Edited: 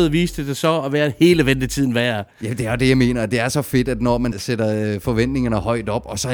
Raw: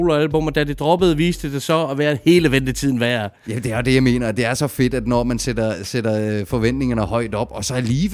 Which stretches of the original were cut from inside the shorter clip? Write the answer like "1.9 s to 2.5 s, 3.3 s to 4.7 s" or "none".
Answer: 5.4 s to 5.8 s